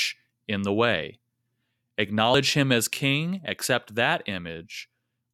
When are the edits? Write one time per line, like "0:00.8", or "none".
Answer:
none